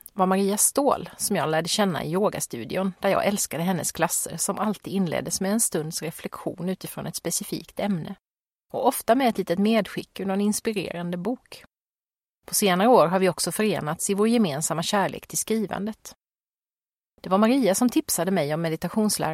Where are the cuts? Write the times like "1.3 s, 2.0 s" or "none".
none

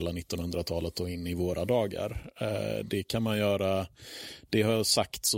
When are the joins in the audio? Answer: none

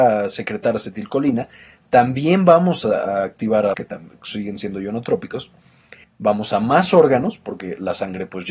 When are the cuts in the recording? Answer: 3.7 s, 6.0 s

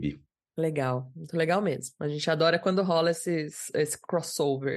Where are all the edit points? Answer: none

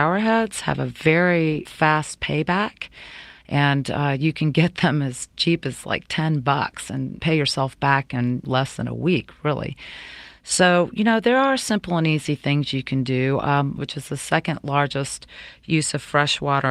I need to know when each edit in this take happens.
13.8 s

